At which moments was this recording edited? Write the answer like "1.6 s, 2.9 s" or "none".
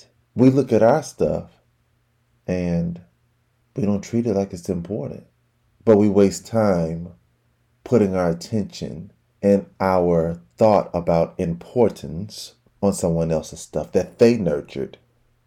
none